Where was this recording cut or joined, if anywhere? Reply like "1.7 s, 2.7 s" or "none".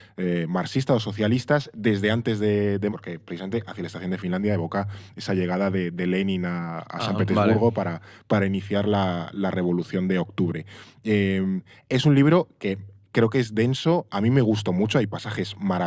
2.9 s